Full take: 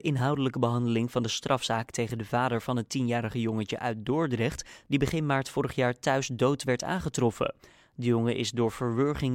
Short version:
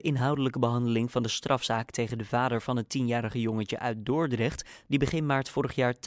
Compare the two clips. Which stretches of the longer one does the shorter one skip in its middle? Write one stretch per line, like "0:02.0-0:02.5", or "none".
none